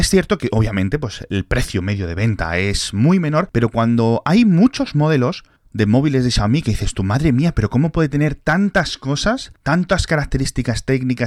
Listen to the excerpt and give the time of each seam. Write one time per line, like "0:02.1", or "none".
none